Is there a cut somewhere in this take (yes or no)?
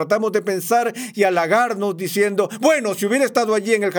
no